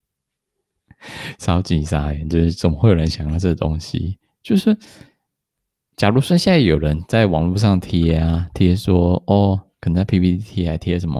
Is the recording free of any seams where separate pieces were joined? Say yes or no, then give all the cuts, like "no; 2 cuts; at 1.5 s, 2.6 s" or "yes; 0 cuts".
yes; 0 cuts